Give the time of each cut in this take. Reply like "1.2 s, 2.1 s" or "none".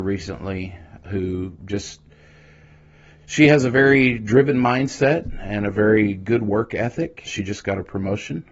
1.0 s, 7.2 s